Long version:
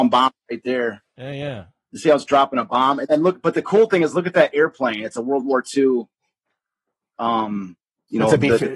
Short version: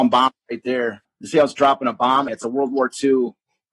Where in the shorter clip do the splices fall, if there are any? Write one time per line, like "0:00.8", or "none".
0:01.0
0:02.3